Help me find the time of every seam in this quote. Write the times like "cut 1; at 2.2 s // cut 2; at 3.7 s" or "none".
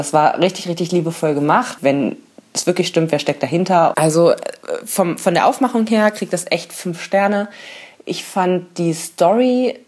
cut 1; at 1.8 s // cut 2; at 3.9 s